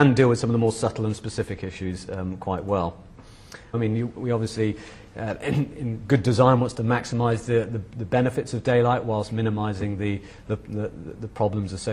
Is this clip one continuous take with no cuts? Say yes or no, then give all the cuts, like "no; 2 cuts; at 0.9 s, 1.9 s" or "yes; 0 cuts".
no; 1 cut; at 3.7 s